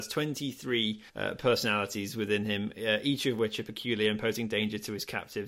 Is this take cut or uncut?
cut